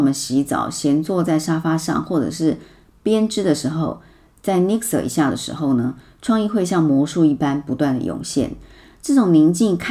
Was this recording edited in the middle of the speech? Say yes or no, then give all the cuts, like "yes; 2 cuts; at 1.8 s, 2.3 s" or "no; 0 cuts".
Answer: no; 0 cuts